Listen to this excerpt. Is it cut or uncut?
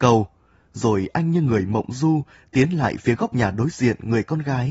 uncut